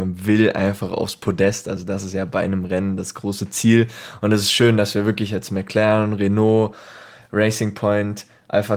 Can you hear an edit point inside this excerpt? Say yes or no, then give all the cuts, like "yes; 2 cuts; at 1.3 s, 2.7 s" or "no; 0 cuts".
no; 0 cuts